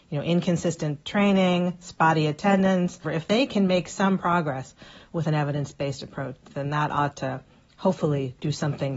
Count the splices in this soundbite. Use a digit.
1